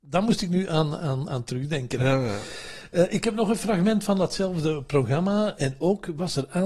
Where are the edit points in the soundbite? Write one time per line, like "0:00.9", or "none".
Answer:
0:05.6